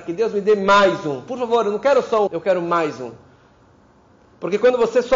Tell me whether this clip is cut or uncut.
cut